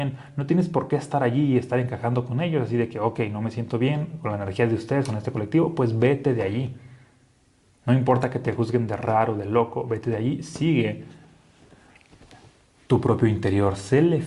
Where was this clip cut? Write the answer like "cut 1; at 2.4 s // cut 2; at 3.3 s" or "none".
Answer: none